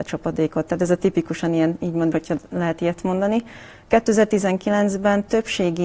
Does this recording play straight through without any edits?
no; 1 cut; at 2.1 s

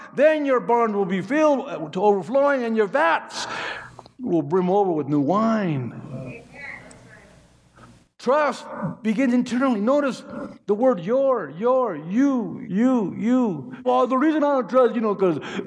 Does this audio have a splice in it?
yes; 2 cuts; at 12.6 s, 13.8 s

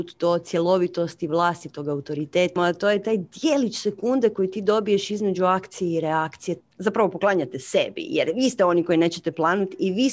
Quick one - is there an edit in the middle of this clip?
yes; 2 cuts; at 2.6 s, 6.6 s

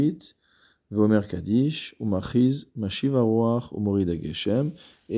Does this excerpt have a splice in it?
yes; 1 cut; at 2.0 s

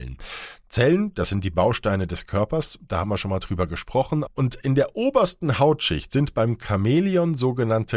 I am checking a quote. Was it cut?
yes; 1 cut; at 4.3 s

